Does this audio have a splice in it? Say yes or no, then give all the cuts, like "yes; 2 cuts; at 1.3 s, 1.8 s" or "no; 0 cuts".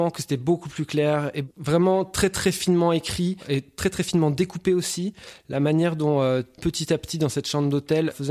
yes; 1 cut; at 6.6 s